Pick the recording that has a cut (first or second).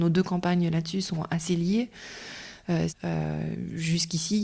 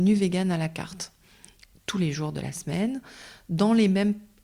first